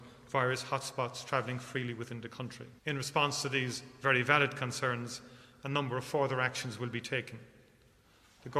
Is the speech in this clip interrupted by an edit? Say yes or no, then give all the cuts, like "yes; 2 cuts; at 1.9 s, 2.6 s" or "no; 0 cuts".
yes; 1 cut; at 2.8 s